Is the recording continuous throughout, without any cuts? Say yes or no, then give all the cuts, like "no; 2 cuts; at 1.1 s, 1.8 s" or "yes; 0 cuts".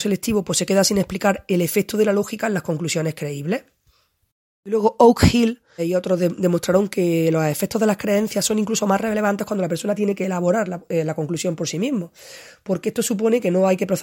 no; 1 cut; at 5.8 s